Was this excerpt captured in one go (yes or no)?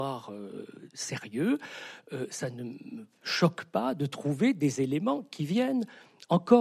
yes